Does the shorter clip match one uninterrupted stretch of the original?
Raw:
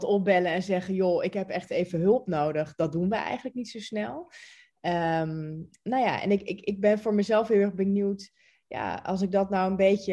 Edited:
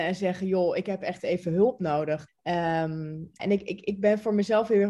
no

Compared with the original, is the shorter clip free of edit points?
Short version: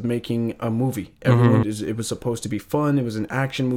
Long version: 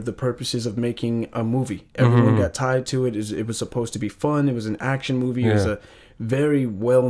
no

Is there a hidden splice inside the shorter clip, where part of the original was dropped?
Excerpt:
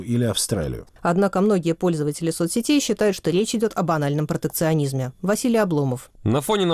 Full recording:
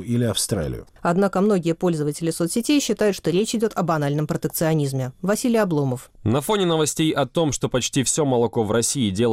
no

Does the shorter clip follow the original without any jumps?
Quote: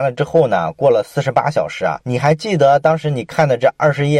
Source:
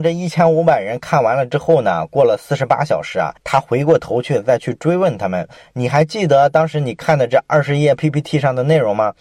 no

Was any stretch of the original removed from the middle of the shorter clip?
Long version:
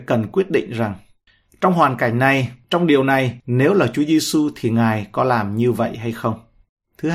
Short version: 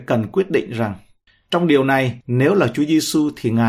yes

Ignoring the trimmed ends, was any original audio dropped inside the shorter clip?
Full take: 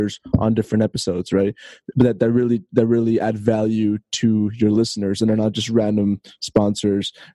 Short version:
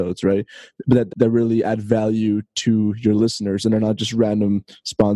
yes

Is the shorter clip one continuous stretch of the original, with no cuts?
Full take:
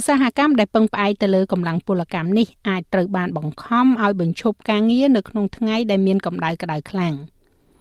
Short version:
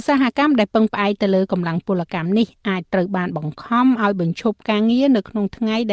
yes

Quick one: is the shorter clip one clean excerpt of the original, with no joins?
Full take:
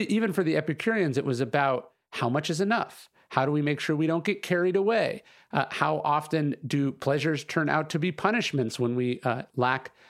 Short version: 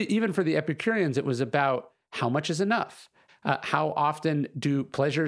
no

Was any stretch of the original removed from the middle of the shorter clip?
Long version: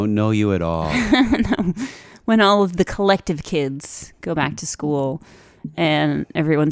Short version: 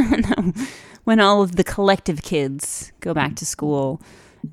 no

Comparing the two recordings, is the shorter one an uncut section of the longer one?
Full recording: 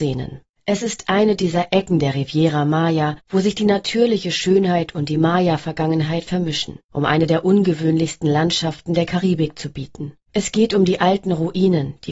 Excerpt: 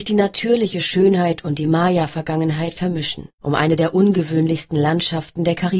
yes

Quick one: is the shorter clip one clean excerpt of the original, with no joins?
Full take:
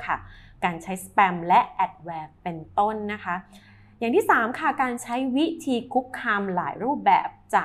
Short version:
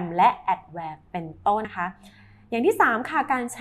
no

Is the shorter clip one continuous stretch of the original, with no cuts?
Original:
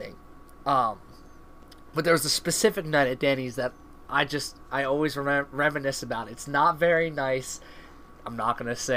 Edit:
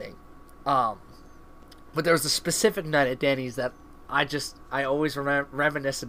yes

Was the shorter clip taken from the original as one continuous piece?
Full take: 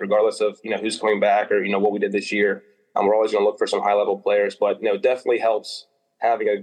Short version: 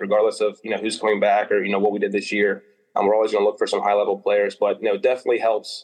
yes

